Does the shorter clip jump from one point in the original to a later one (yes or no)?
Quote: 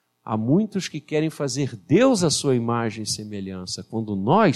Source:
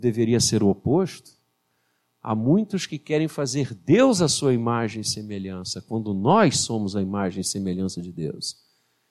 no